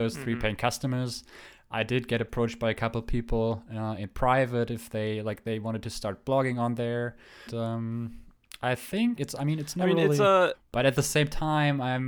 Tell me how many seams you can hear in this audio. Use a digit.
3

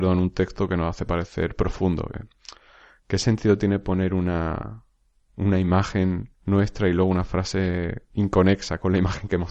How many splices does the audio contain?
2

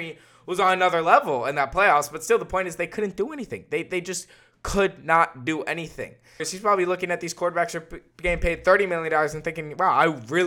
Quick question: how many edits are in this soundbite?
1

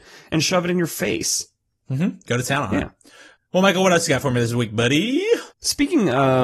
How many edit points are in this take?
1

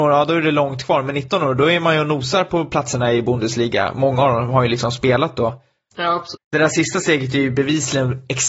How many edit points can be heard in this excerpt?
1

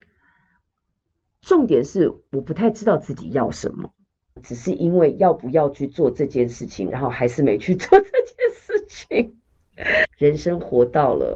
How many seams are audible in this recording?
3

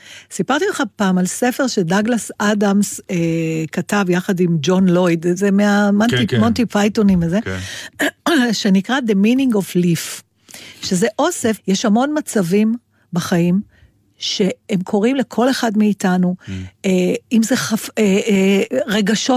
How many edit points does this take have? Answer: 1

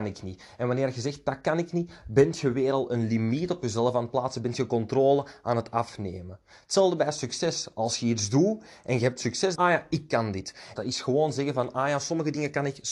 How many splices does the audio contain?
2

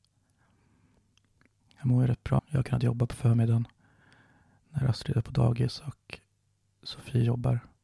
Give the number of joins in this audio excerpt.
1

